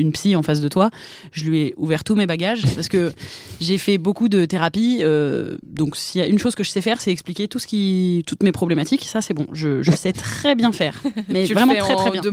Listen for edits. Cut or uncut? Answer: uncut